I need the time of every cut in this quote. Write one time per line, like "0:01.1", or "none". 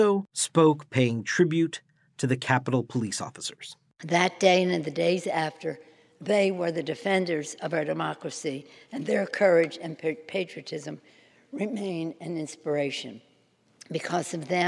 none